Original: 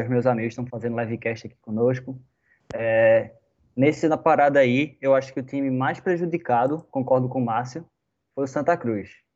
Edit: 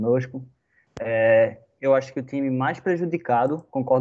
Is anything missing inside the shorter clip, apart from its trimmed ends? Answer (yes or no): yes